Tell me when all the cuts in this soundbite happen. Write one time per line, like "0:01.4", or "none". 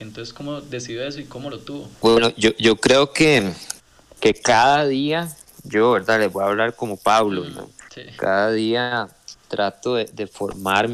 0:01.9